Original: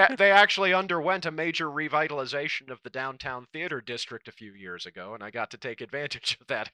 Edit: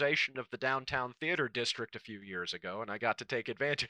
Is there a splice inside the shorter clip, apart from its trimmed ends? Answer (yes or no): no